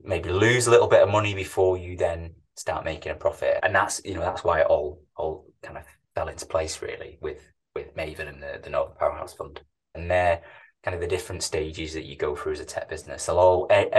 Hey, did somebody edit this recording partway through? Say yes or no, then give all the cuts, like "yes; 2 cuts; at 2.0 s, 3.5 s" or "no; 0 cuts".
yes; 2 cuts; at 3.6 s, 9.9 s